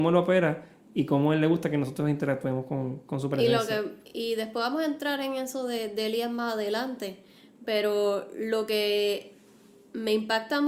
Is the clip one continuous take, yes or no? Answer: yes